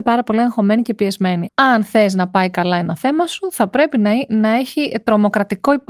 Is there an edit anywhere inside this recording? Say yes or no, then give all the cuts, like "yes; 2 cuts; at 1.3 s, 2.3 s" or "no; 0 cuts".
yes; 1 cut; at 1.5 s